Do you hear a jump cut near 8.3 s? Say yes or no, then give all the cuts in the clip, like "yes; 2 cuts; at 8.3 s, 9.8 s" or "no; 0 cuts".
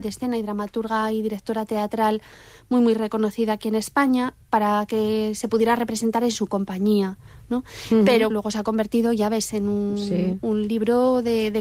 yes; 1 cut; at 8.3 s